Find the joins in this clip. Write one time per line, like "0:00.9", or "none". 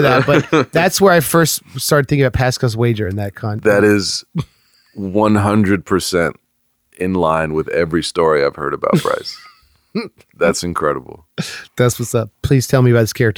0:12.3